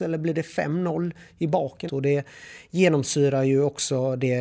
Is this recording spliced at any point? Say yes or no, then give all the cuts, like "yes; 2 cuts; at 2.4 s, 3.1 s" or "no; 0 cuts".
yes; 1 cut; at 1.9 s